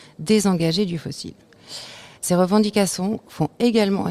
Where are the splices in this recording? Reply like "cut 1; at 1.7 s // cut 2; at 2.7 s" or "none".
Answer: cut 1; at 2.1 s